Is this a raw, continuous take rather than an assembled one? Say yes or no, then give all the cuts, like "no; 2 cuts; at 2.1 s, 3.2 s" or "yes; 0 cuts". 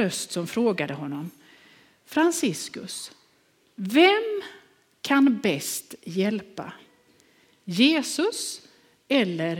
yes; 0 cuts